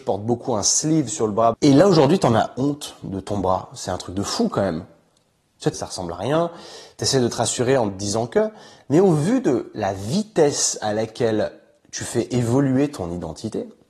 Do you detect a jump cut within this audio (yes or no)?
yes